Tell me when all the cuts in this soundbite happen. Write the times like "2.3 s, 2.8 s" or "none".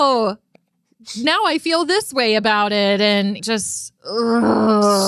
3.4 s